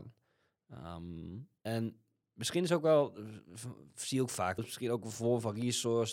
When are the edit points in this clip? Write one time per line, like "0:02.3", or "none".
0:01.6
0:04.6